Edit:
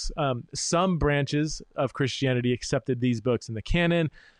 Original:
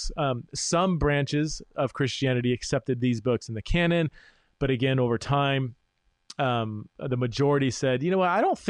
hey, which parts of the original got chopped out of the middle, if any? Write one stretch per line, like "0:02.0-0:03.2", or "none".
none